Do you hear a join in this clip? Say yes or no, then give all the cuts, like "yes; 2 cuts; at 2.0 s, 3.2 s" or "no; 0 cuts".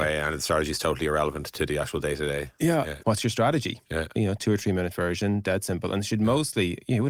yes; 2 cuts; at 3.0 s, 4.1 s